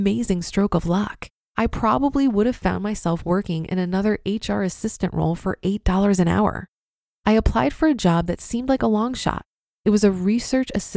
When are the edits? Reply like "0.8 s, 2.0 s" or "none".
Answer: 1.5 s, 7.1 s